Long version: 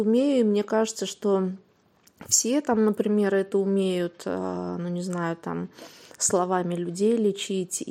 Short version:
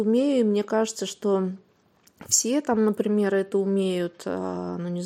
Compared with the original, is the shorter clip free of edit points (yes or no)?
yes